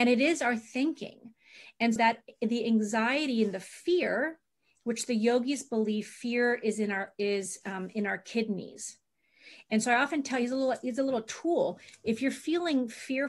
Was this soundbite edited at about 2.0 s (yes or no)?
yes